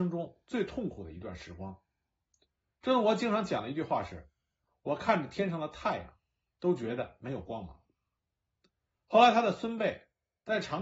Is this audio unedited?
yes; 0 cuts

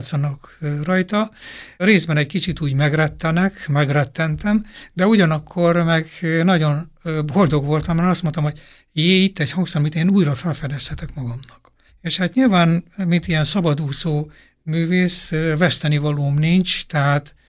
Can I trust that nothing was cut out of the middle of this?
no; 1 cut; at 11.9 s

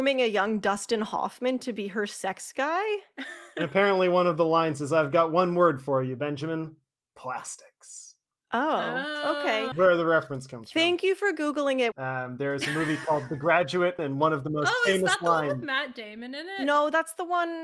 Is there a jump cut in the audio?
yes; 3 cuts; at 9.7 s, 11.9 s, 14.0 s

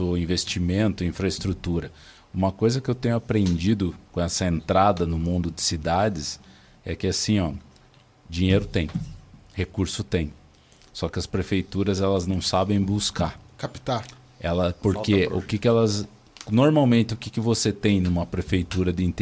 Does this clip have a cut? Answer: no; 0 cuts

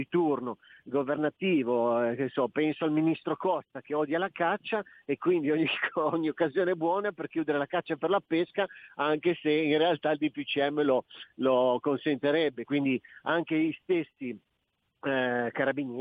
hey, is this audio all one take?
no; 1 cut; at 12.6 s

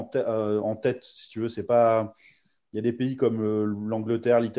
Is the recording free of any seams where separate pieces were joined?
yes; 0 cuts

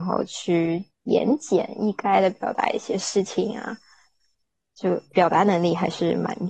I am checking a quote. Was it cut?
no; 0 cuts

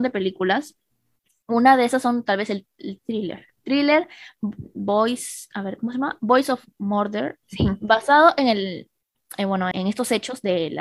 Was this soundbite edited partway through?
yes; 3 cuts; at 3.0 s, 7.4 s, 9.7 s

